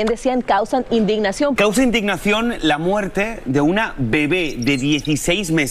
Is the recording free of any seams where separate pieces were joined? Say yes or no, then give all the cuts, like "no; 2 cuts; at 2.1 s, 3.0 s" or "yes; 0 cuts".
no; 1 cut; at 1.6 s